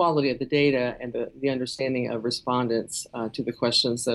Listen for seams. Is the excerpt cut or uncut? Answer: uncut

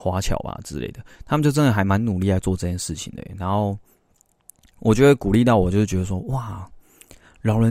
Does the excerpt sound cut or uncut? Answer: uncut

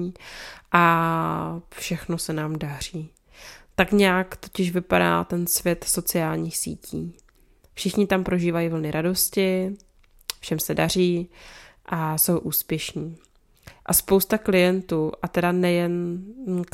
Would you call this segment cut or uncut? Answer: uncut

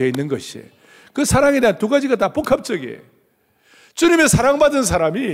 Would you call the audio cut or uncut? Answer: uncut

